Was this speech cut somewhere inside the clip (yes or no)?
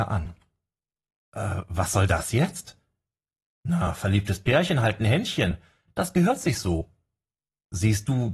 no